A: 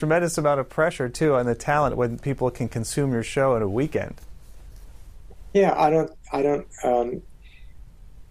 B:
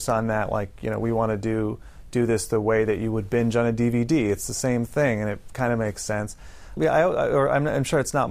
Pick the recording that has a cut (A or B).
B